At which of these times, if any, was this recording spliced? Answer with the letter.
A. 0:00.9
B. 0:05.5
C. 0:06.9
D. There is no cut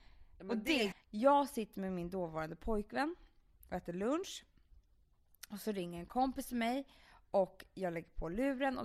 A